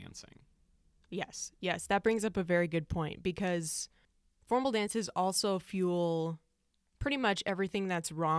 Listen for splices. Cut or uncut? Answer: uncut